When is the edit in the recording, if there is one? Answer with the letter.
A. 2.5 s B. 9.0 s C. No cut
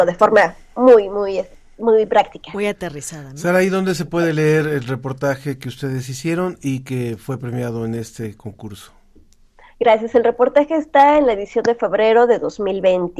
C